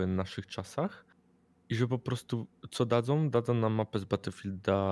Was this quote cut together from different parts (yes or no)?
no